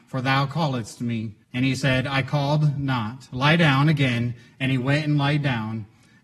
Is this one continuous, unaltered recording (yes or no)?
no